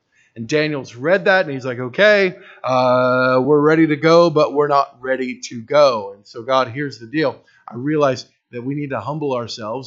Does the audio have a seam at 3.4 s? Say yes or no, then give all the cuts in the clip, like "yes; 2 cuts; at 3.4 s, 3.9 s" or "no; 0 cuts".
no; 0 cuts